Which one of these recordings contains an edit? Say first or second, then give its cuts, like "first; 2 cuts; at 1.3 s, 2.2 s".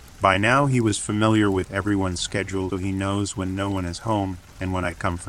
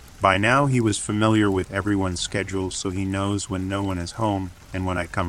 first; 1 cut; at 2.7 s